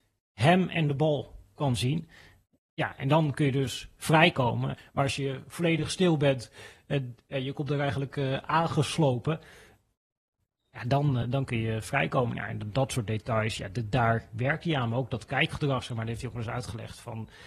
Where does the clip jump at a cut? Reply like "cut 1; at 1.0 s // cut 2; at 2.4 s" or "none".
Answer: cut 1; at 4.8 s // cut 2; at 11.2 s